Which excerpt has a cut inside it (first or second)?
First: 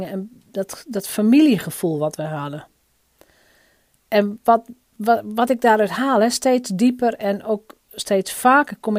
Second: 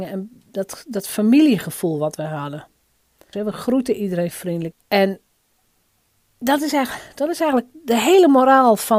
second